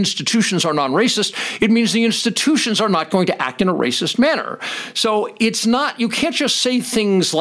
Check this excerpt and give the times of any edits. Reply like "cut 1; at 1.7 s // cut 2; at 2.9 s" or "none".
none